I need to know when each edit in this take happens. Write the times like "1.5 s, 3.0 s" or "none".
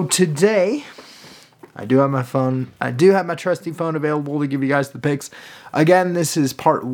none